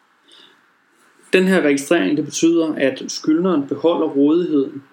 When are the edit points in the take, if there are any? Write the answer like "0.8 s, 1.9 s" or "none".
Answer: none